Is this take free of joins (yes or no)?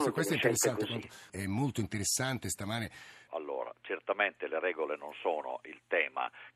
no